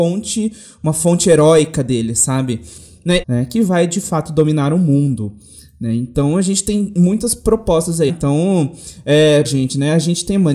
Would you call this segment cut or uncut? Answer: cut